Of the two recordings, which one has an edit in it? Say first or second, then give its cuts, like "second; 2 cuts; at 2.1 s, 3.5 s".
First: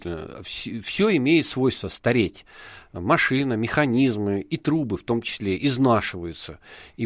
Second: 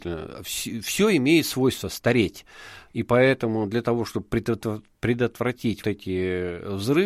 second; 2 cuts; at 2.9 s, 5.8 s